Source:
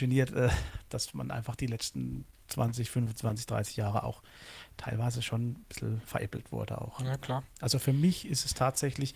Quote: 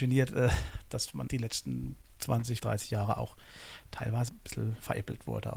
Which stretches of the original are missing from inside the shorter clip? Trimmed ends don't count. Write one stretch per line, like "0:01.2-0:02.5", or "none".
0:01.3-0:01.6
0:02.9-0:03.5
0:05.1-0:05.5

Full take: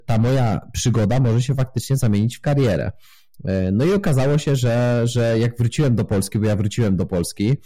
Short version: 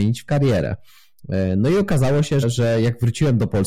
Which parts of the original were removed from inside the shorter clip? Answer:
0:04.6-0:05.0

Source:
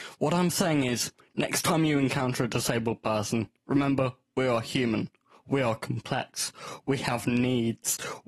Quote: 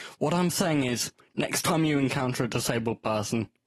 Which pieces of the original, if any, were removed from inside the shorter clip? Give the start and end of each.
none

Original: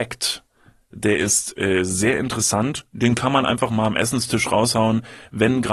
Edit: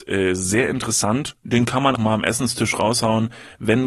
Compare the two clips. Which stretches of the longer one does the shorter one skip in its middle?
0:03.4-0:03.7

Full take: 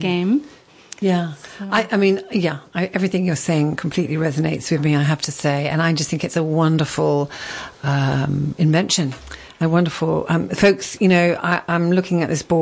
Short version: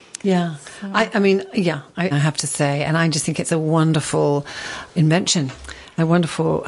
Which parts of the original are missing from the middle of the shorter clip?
0:02.9-0:04.9
0:07.8-0:08.6

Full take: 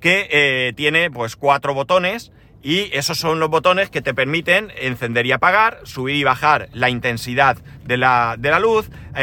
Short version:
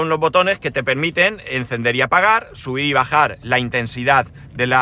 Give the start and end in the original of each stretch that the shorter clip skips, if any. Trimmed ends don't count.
none

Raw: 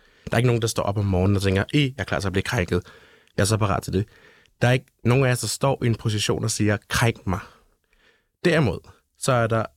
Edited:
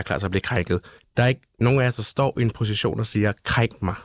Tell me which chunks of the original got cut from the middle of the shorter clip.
0:03.0-0:04.4

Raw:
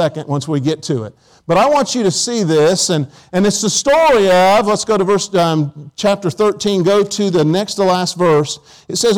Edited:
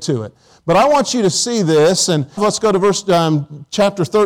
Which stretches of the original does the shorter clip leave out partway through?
0:03.2-0:04.6

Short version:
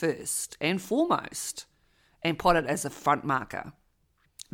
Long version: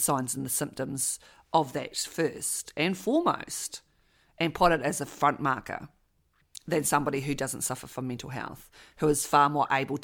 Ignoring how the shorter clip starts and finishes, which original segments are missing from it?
none

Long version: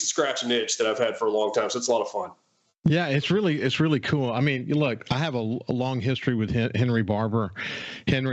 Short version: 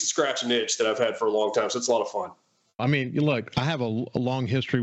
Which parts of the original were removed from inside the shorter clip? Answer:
0:02.8-0:04.3

